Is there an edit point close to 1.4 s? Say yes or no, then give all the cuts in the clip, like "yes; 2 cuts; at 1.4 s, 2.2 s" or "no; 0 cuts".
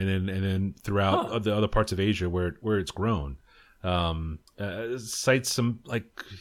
no; 1 cut; at 4.5 s